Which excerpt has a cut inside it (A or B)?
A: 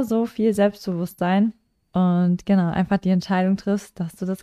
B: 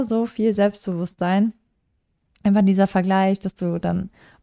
A